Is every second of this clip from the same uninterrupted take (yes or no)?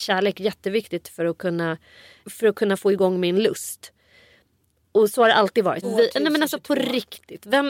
no